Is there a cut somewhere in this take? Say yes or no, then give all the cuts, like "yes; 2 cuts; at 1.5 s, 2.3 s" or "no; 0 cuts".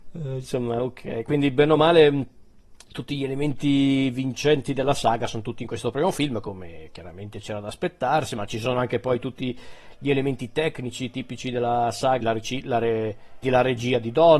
yes; 2 cuts; at 12.2 s, 13.4 s